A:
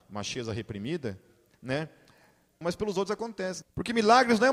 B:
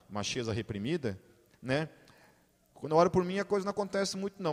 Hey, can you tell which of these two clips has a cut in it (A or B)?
A